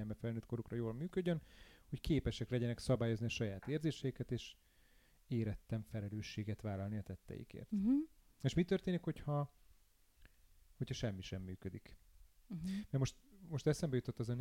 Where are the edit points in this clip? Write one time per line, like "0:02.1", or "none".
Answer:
none